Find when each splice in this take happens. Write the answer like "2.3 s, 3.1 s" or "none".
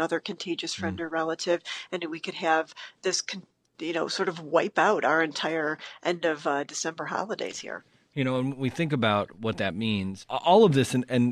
none